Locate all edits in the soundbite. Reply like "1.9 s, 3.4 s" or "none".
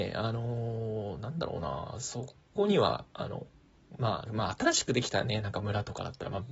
3.1 s, 4.3 s